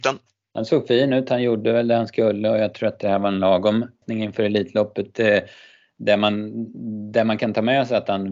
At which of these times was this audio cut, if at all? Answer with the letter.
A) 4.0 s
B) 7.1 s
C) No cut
A